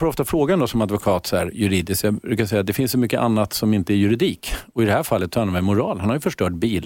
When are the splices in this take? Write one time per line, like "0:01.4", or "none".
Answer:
none